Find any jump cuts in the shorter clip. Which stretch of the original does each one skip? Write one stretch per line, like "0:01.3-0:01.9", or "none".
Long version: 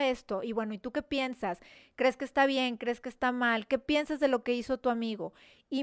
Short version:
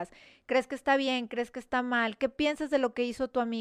none